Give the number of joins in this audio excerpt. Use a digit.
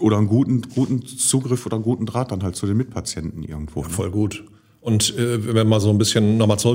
0